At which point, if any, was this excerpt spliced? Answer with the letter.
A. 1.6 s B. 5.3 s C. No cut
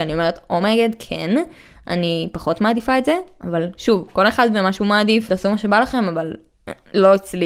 B